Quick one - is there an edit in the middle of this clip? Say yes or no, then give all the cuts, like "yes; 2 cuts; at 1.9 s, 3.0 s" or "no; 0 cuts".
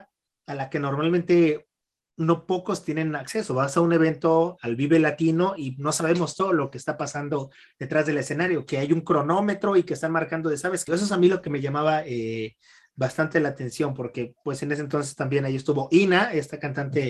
yes; 2 cuts; at 4.6 s, 10.9 s